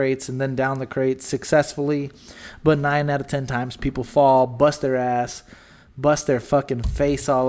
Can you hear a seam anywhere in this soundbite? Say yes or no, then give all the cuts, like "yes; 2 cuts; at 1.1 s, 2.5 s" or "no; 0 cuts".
no; 0 cuts